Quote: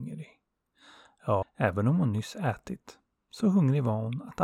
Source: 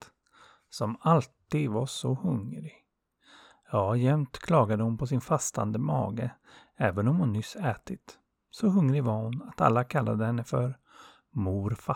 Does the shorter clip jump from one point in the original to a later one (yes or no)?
yes